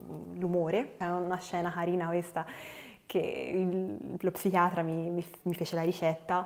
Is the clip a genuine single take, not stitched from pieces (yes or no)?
no